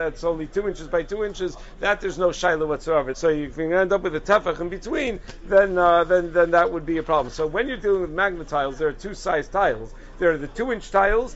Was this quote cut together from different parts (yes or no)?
yes